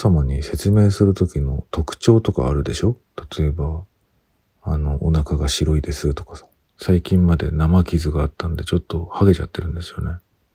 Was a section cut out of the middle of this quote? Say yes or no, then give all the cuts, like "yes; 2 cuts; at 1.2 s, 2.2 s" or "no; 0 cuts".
yes; 1 cut; at 6.6 s